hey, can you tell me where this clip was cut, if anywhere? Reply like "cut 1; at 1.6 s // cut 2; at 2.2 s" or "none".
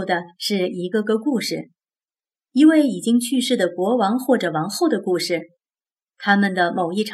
none

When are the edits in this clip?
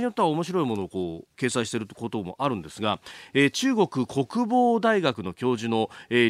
cut 1; at 1.3 s

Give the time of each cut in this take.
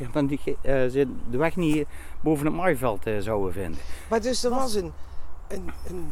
none

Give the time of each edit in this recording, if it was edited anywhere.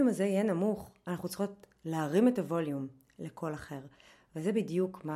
none

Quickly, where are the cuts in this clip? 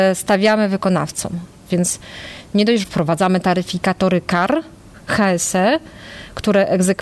cut 1; at 1.7 s // cut 2; at 2.8 s

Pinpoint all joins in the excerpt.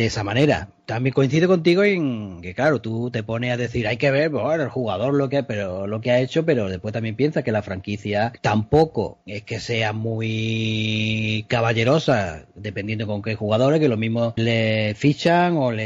cut 1; at 9.2 s // cut 2; at 14.4 s

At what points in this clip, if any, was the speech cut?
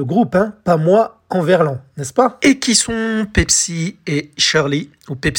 none

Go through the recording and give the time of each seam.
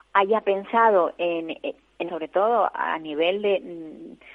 cut 1; at 2.1 s

